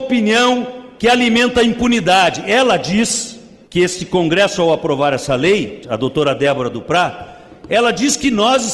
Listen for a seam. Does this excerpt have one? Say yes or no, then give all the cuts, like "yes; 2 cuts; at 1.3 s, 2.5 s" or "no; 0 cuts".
no; 0 cuts